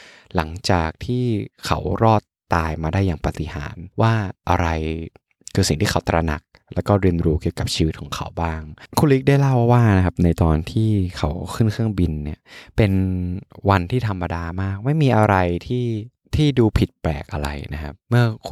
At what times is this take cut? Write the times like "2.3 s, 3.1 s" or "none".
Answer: 3.9 s